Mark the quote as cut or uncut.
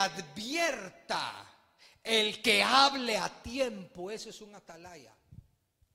uncut